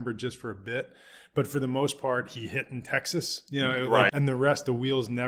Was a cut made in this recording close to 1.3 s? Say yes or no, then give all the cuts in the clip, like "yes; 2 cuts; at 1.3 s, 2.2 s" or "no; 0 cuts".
no; 1 cut; at 4.1 s